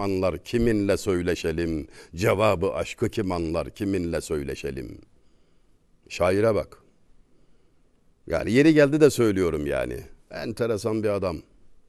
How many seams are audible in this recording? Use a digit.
1